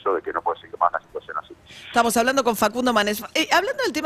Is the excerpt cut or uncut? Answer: uncut